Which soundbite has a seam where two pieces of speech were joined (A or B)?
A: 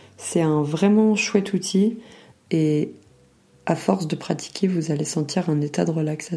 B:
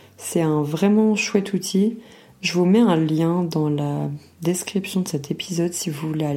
A